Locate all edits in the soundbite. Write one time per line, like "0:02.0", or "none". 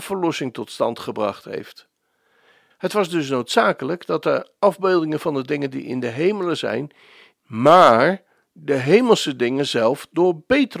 0:02.7
0:07.3